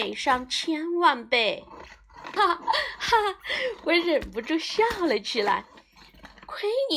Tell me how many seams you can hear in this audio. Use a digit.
1